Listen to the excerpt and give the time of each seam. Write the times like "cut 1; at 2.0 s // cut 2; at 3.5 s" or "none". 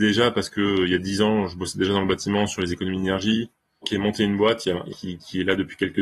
cut 1; at 3.8 s // cut 2; at 4.9 s